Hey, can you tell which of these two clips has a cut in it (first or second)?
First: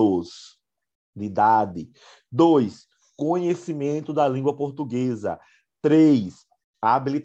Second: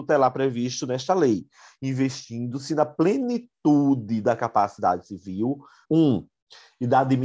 second